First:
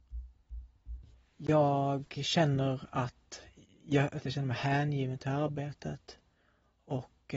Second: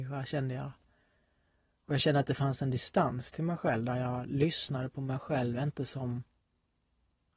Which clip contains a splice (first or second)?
first